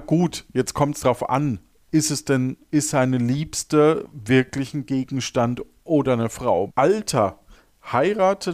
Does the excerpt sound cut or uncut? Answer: cut